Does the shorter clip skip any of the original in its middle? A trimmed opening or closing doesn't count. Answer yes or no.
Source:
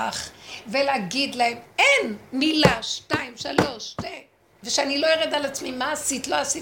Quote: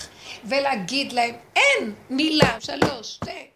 yes